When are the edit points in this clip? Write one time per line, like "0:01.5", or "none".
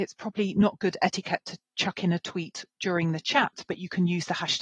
none

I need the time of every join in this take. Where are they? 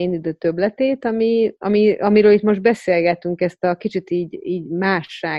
none

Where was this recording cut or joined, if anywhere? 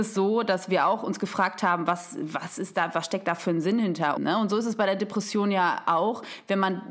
0:04.2

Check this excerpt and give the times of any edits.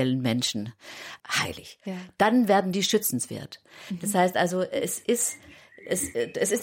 0:01.2

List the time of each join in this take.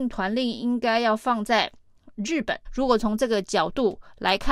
0:02.6

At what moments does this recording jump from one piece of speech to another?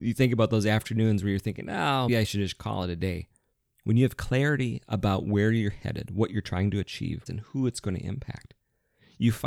0:02.1
0:07.3

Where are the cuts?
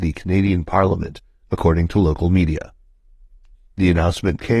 0:03.5

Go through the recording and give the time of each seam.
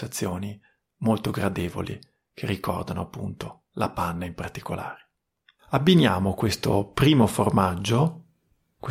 none

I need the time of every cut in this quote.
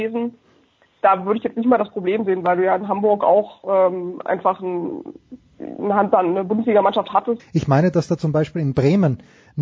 0:07.4

